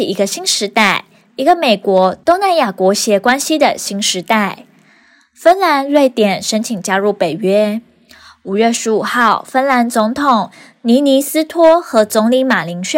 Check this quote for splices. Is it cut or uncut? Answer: uncut